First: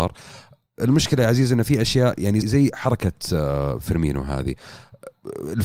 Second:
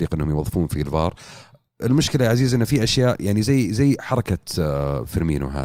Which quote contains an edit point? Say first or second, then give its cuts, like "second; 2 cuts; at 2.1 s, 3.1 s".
first; 1 cut; at 2.4 s